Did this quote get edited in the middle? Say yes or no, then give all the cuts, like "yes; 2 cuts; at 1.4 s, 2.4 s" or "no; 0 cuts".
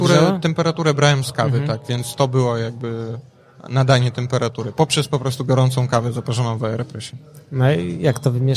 no; 0 cuts